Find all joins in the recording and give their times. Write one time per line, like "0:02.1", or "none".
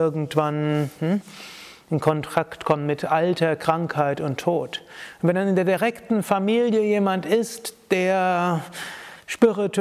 none